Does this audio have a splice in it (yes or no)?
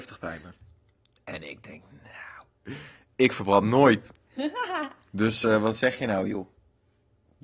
no